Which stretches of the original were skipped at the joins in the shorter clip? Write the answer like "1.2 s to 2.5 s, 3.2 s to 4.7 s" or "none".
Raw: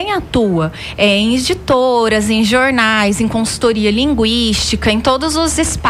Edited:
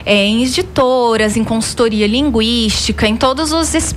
2.2 s to 3.2 s